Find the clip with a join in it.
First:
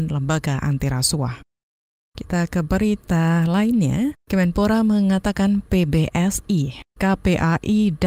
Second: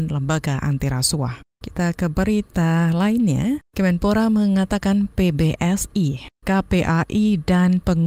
second; 1 cut; at 1.5 s

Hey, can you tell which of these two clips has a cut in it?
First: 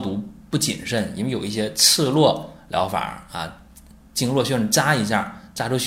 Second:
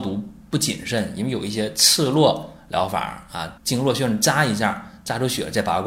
second; 1 cut; at 3.6 s

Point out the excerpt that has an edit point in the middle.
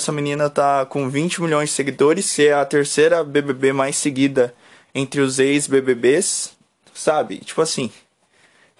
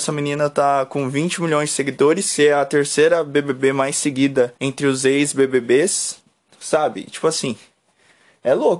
second; 1 cut; at 4.6 s

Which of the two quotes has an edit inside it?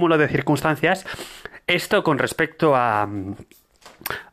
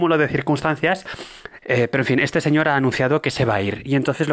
second; 1 cut; at 1.6 s

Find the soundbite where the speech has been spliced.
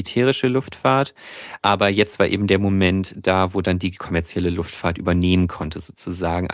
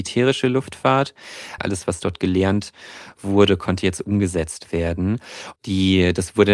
second; 2 cuts; at 1.6 s, 5.6 s

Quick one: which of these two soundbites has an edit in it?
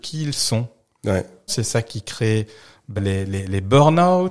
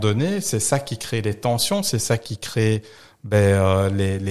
first; 2 cuts; at 1.5 s, 3.0 s

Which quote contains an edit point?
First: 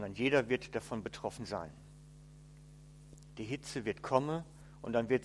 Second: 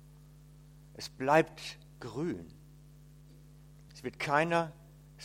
second; 1 cut; at 3.9 s

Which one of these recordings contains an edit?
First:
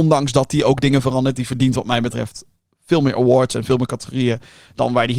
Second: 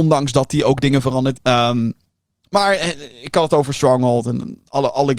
second; 1 cut; at 1.3 s

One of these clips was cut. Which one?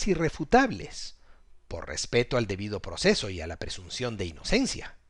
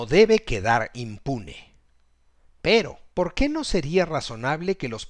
second; 1 cut; at 3.1 s

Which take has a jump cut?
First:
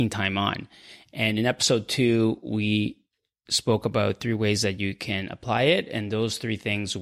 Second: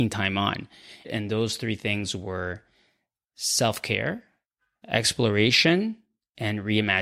second; 1 cut; at 1.0 s

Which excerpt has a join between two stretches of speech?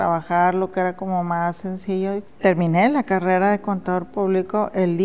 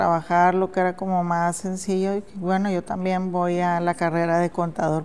first; 1 cut; at 2.3 s

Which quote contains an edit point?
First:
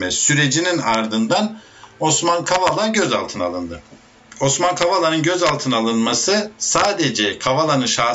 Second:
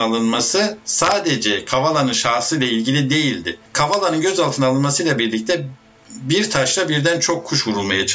second; 1 cut; at 3.7 s

